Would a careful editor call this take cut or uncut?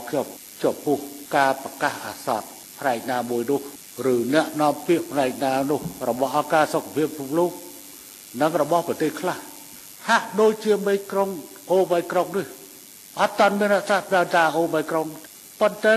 uncut